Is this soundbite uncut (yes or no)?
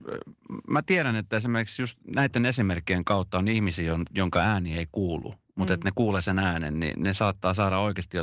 yes